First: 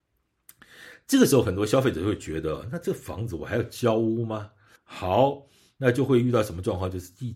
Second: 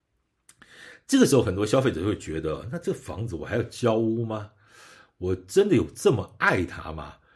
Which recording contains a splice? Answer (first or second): first